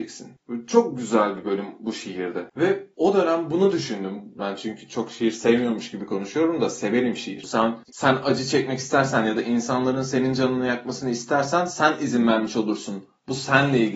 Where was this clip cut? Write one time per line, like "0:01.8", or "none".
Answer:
0:04.4
0:07.4